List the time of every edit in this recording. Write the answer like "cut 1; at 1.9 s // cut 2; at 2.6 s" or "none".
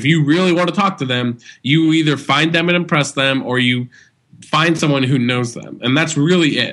none